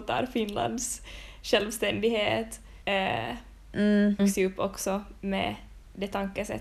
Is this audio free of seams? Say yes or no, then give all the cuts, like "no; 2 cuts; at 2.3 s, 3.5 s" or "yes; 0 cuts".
no; 2 cuts; at 2.8 s, 4.2 s